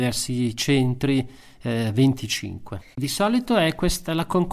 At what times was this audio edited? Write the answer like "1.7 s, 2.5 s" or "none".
2.9 s